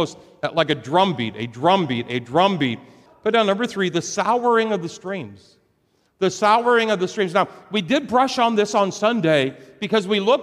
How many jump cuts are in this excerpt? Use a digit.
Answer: 1